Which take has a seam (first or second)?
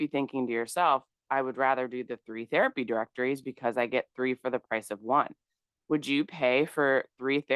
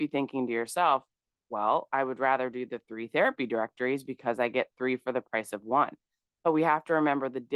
first